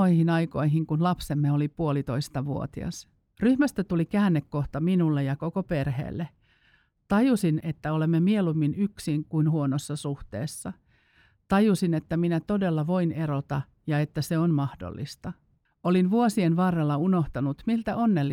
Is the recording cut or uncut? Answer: cut